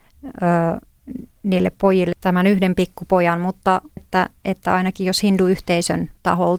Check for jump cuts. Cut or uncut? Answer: cut